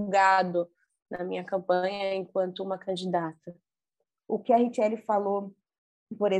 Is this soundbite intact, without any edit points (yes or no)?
no